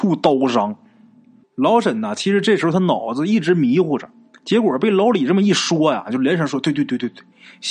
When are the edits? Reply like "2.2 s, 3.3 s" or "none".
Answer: 1.4 s